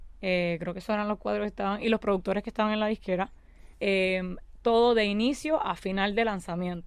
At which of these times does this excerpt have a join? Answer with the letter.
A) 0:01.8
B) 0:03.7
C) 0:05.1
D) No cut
B